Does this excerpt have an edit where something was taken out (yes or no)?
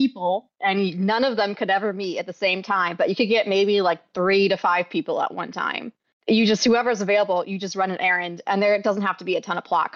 no